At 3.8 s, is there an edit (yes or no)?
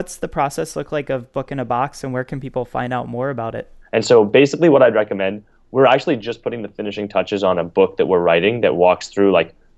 yes